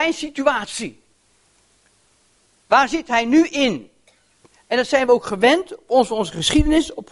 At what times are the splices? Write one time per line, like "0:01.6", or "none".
0:04.5

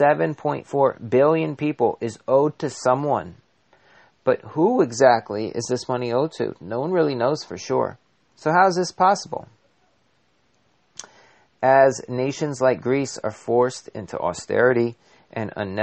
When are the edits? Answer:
none

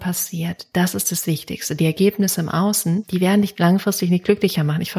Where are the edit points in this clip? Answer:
none

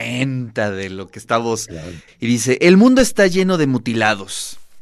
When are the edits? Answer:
0:02.1

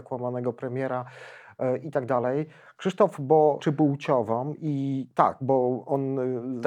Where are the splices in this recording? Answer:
0:03.6

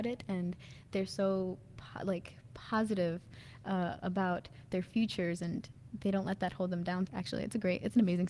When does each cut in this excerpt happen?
0:07.1

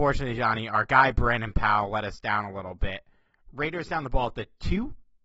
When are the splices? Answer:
none

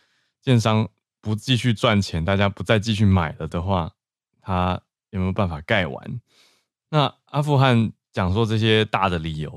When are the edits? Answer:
0:06.7

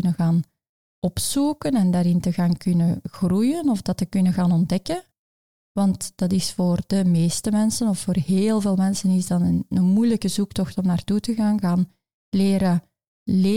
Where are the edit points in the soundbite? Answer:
none

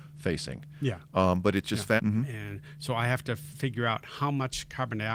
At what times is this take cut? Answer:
0:02.0

